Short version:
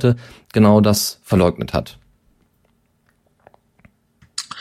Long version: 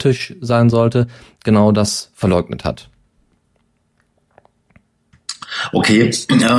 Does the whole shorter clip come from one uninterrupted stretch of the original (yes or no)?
yes